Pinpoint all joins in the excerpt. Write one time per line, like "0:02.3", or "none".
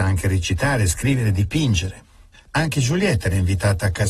0:02.3